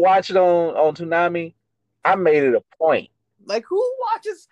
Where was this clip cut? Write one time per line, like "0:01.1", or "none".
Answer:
0:03.4